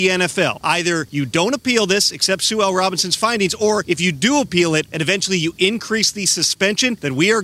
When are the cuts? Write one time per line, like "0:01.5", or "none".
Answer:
none